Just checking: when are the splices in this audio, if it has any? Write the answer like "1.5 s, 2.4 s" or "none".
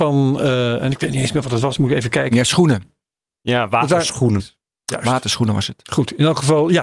4.4 s

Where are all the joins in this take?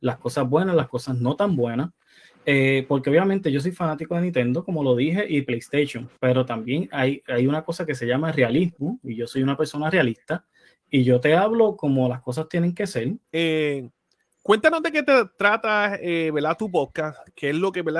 13.2 s

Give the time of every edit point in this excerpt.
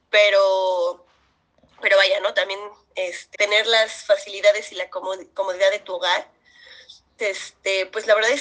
3.3 s, 7.2 s

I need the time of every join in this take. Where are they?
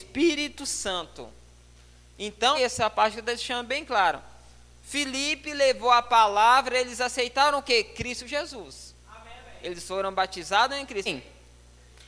2.5 s, 11.1 s

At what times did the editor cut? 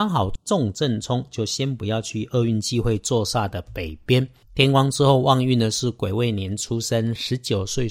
4.4 s

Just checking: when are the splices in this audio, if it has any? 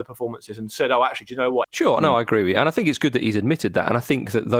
1.6 s

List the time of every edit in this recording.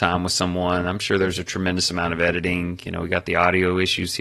none

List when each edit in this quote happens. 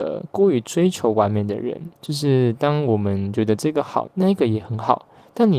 2.0 s, 4.1 s

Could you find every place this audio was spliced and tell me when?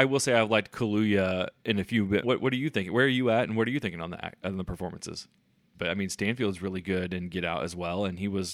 2.2 s, 5.7 s

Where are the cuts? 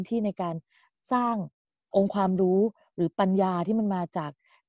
1.9 s

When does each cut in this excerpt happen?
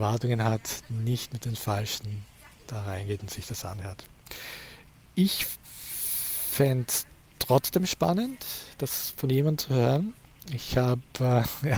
none

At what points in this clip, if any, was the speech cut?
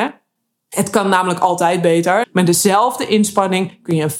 2.2 s

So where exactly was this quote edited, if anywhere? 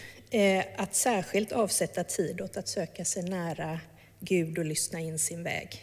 none

